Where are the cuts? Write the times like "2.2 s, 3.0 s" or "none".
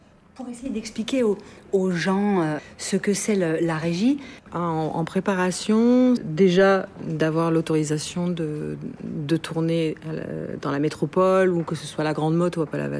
6.2 s